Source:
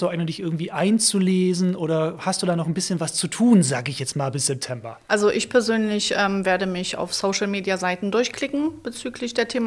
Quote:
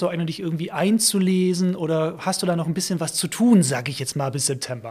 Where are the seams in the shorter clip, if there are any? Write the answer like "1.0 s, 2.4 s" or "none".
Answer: none